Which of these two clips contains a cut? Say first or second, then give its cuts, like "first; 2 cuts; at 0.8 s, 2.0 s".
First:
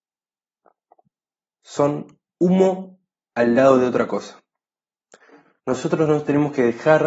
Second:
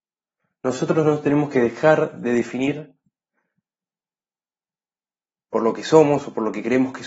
first; 1 cut; at 5.6 s